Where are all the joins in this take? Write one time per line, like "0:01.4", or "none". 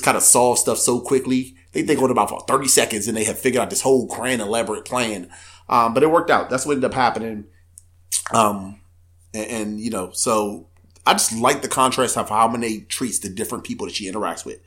none